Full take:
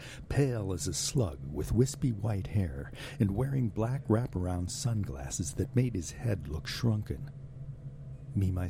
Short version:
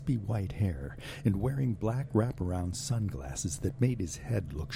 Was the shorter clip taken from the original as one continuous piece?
yes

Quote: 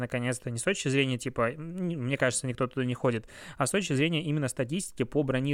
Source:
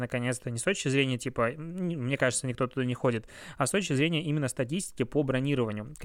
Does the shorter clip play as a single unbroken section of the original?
yes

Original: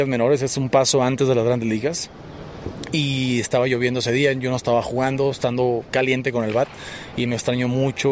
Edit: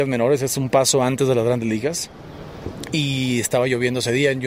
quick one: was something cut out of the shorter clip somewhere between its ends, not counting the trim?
no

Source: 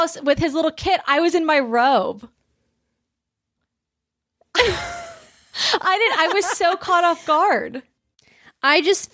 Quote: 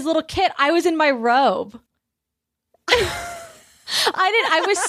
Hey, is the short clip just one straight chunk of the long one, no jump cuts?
no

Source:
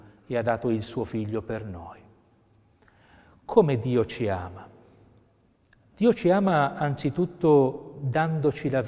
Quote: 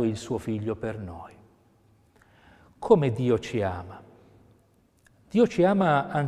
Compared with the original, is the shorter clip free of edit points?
yes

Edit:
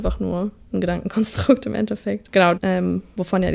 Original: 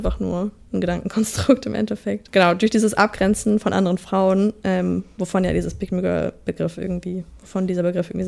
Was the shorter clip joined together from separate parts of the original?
yes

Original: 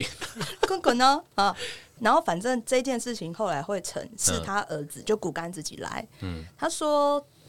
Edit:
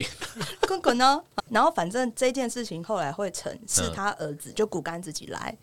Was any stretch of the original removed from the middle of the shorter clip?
yes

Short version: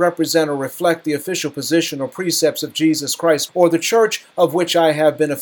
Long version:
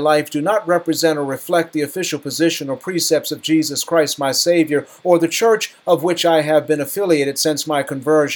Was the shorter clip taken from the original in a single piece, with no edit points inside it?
no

